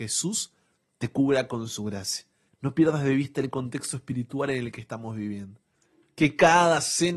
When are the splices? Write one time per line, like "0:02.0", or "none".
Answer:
0:02.5